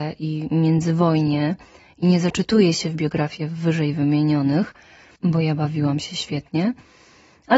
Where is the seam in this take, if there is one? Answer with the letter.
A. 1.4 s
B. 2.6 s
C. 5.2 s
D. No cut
C